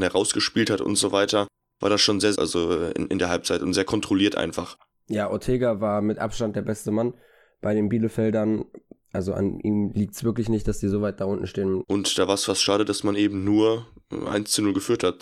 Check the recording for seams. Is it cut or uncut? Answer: cut